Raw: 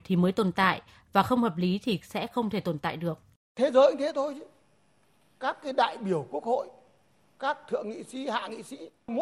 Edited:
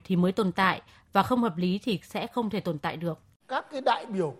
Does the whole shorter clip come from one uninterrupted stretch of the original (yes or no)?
no